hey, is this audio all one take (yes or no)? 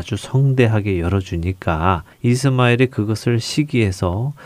no